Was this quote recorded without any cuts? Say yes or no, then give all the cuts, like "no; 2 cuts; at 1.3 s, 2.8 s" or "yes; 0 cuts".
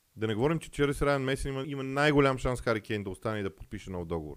no; 1 cut; at 1.6 s